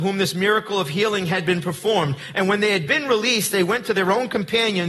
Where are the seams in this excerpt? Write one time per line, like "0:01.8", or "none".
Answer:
none